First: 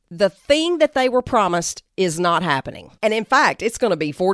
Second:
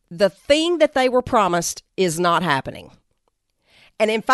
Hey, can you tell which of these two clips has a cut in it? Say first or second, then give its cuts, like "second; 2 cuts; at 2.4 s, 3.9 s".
first; 1 cut; at 3.0 s